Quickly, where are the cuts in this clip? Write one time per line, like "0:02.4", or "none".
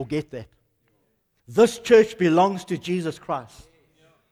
0:01.4